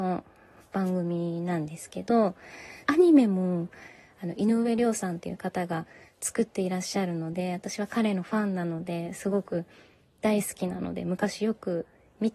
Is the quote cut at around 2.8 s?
yes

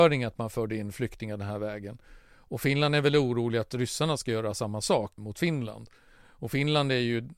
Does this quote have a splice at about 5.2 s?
yes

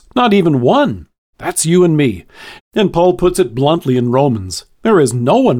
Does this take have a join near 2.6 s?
yes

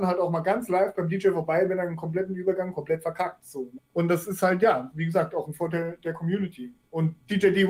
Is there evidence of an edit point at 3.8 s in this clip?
yes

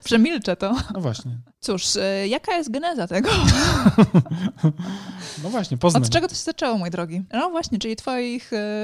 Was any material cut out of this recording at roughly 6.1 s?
no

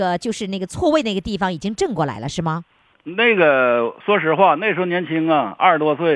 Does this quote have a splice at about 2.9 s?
yes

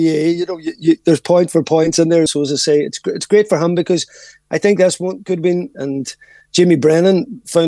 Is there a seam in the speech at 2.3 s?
yes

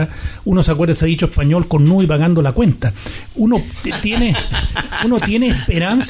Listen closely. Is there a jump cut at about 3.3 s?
no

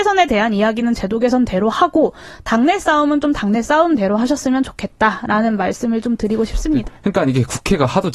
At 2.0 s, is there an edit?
no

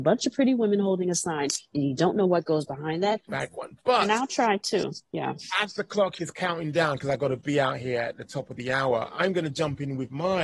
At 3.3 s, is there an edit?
yes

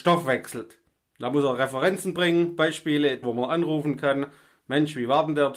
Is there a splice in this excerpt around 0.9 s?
no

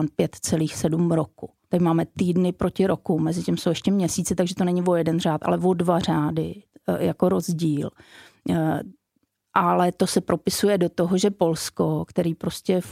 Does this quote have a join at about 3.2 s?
no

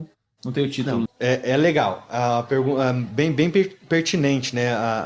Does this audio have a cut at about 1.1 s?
yes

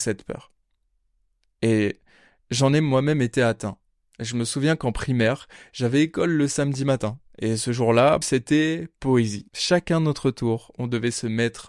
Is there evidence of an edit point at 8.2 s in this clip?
yes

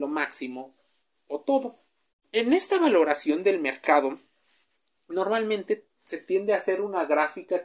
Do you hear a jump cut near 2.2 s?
yes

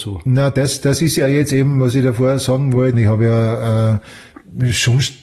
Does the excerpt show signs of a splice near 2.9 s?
yes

